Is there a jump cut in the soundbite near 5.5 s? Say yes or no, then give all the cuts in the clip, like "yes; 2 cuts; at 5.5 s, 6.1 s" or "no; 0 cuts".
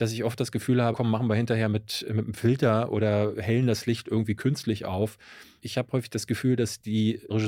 no; 1 cut; at 0.9 s